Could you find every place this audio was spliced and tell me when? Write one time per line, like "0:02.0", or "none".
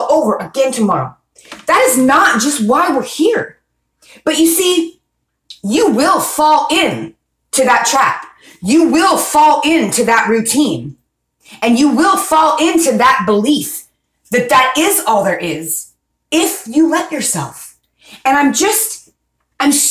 none